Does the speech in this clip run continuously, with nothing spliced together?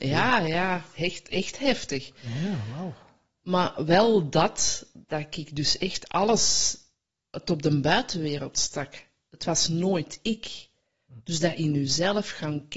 yes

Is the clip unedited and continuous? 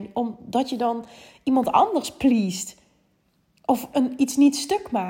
yes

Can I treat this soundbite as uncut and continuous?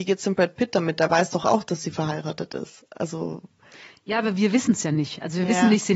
yes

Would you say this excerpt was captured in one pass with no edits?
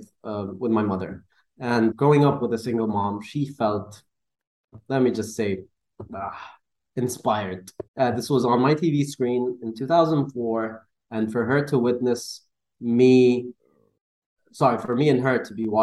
no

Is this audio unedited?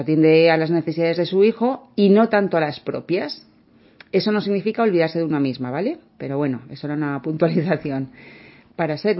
yes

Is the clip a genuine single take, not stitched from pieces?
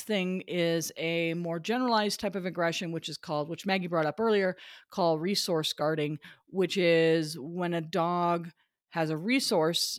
yes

